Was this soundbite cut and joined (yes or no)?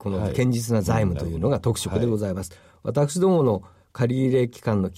no